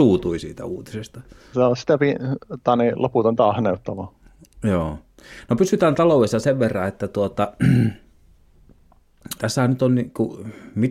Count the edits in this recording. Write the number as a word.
two